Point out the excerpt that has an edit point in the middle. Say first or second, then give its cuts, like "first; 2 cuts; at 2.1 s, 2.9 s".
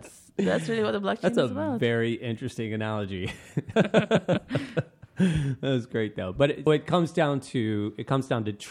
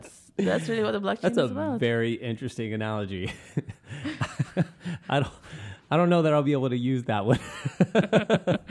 first; 2 cuts; at 3.7 s, 6.7 s